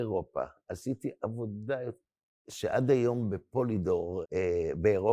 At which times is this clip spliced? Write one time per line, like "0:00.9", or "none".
0:04.2